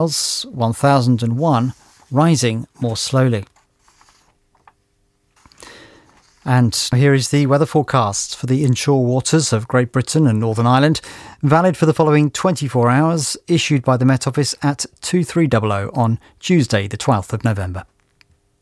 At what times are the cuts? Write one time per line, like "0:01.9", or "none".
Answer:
0:06.9